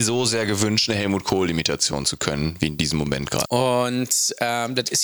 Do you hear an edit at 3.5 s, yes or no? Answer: yes